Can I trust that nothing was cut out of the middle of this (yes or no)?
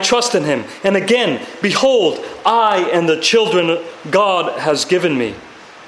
yes